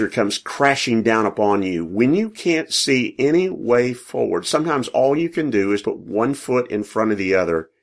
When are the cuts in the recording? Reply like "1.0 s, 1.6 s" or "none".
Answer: 5.8 s